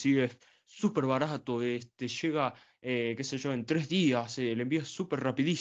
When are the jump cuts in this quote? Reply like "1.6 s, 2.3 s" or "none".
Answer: none

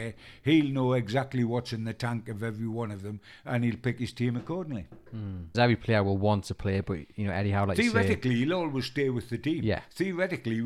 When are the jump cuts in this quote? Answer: 5.5 s

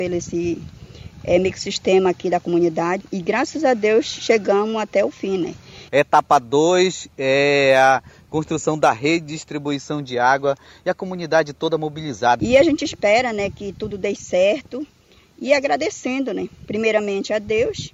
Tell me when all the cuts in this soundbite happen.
3.0 s, 5.9 s, 12.4 s

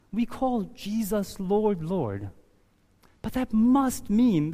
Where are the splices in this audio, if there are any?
none

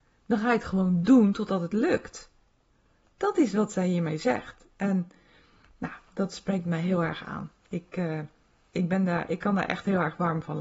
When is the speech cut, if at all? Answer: none

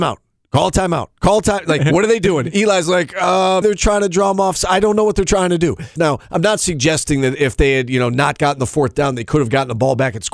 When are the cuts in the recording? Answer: 3.6 s, 6.0 s

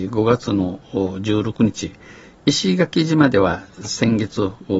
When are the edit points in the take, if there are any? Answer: none

